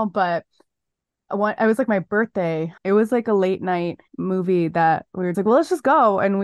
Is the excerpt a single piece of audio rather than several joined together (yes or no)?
no